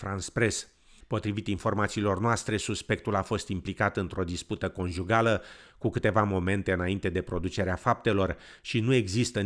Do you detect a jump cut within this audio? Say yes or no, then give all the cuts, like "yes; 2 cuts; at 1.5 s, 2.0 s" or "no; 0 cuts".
no; 0 cuts